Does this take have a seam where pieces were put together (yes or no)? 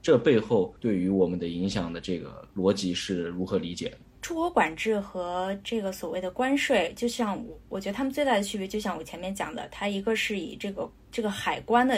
no